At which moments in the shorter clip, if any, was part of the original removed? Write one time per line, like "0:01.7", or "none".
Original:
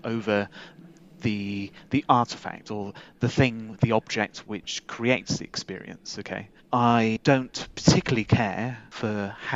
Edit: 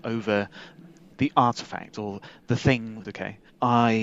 0:01.1
0:03.0

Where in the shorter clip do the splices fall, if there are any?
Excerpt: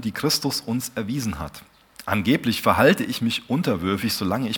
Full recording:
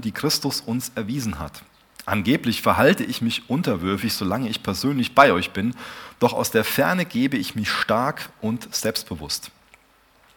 none

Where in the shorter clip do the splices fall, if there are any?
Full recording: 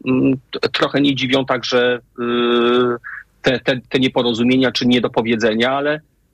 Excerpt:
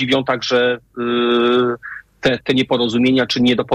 0:02.4

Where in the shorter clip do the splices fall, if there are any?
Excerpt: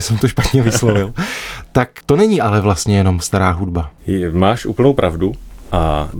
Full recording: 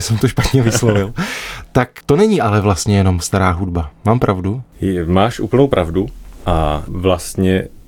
0:04.0

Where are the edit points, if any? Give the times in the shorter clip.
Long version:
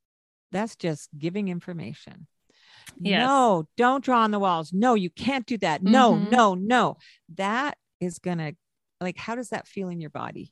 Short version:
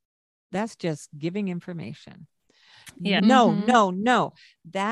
0:03.2

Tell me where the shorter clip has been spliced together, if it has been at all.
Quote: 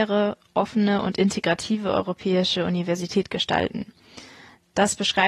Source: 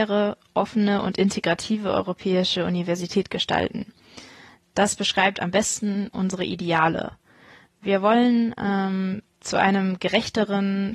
none

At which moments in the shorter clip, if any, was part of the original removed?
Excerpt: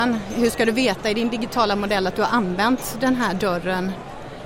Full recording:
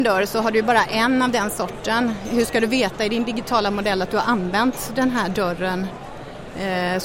none

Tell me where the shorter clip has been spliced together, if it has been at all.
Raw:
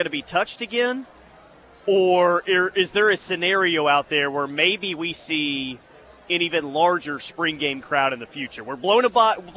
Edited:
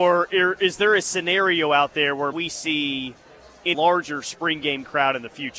0:02.3
0:03.7

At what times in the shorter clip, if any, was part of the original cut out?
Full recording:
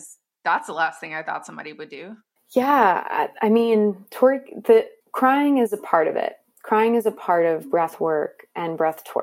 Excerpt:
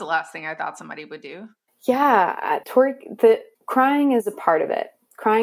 0:02.6

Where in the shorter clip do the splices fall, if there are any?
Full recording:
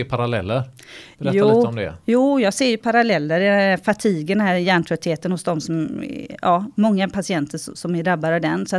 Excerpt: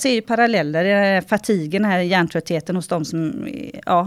none

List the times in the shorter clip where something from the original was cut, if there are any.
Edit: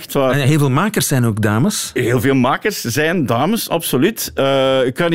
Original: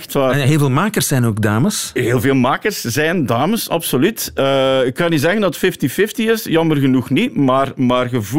none

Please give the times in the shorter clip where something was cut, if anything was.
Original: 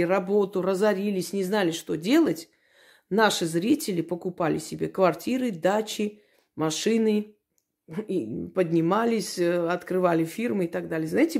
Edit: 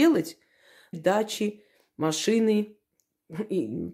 0:00.9

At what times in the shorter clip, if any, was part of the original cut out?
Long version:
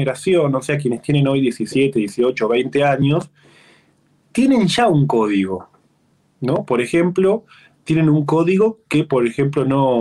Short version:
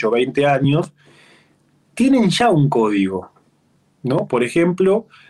none

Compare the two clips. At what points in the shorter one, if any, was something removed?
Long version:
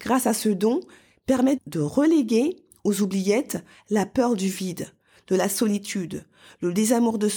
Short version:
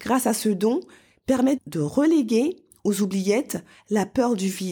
none

